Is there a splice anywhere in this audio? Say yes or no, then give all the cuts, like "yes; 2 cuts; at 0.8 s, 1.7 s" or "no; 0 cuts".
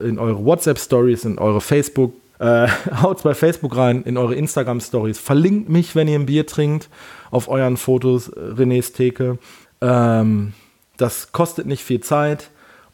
yes; 2 cuts; at 2.3 s, 9.6 s